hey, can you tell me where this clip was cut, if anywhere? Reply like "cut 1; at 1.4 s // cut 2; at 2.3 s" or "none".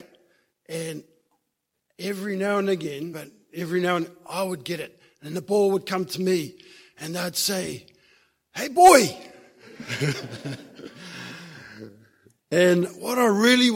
cut 1; at 3.1 s